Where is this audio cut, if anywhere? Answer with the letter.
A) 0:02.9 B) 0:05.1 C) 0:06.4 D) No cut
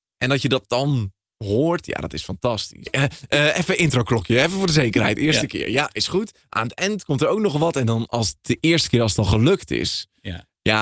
A